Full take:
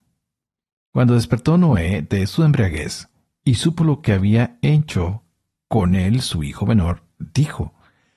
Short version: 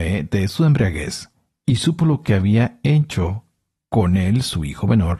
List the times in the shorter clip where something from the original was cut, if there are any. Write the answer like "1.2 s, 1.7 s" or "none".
none